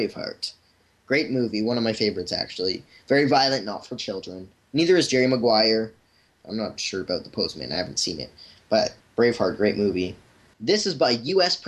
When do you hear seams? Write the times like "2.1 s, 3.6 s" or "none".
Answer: 6.3 s, 10.5 s